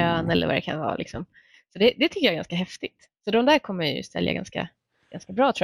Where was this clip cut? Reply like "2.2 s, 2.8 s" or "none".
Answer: none